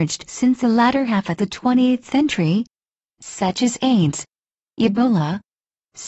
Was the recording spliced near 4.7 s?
no; 0 cuts

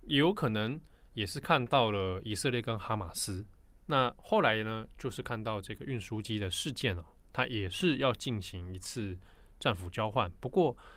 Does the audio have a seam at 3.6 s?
yes; 1 cut; at 3.6 s

